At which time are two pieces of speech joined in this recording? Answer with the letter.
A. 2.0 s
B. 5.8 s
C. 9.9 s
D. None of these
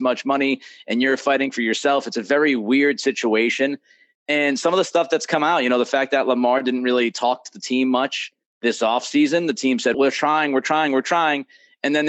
C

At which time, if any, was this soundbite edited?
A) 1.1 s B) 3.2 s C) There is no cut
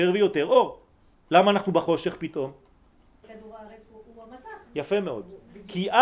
B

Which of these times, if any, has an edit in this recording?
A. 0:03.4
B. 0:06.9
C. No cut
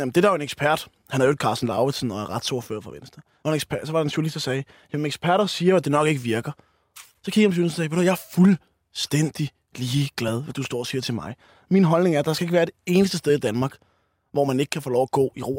C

